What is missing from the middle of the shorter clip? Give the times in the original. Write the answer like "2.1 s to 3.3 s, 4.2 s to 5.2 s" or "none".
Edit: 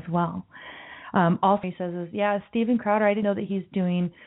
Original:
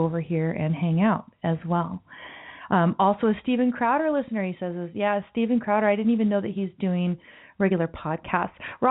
3.2 s to 4.5 s, 6.0 s to 6.3 s